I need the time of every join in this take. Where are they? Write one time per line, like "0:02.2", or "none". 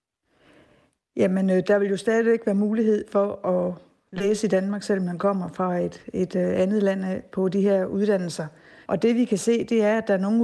0:08.9